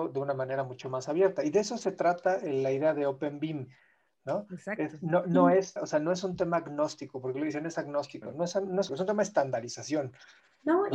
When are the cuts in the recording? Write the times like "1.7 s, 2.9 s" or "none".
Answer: 5.8 s, 8.9 s